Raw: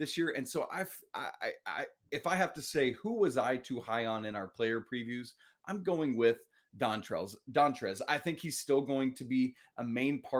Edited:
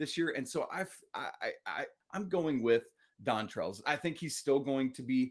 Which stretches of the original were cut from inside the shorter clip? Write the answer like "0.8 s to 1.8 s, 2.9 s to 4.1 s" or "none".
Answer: 2.0 s to 5.5 s, 7.4 s to 8.1 s